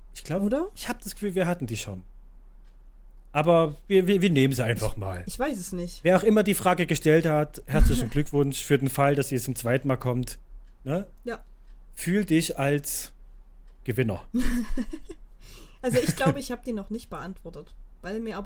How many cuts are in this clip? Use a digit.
0